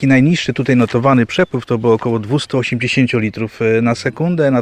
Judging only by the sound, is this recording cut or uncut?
uncut